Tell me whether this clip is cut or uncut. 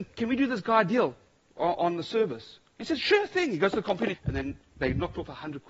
cut